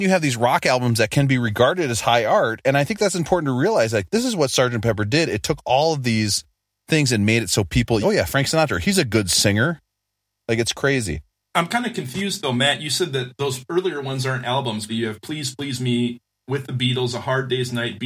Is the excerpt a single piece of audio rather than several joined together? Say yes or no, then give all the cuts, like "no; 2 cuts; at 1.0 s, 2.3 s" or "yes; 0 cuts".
no; 2 cuts; at 8.0 s, 14.9 s